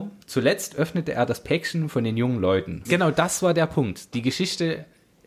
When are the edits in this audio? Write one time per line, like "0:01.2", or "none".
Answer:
0:02.8